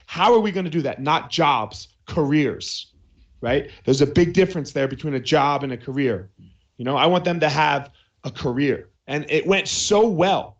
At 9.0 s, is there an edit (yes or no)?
yes